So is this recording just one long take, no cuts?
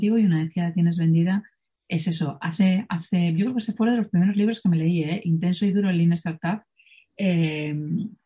yes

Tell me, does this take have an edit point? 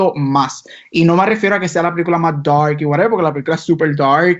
no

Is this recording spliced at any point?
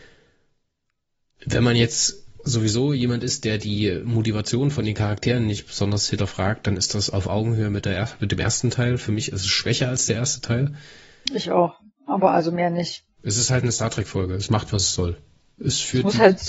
yes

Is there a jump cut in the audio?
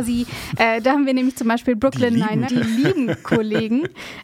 yes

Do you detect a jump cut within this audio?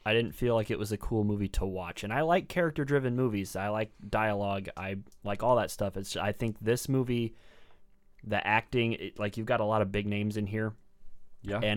no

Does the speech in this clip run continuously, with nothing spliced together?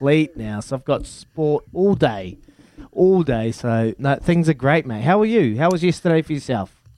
no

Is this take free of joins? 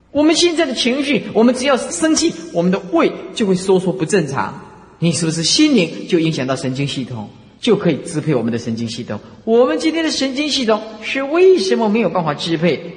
no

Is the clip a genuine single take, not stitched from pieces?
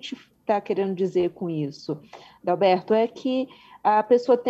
yes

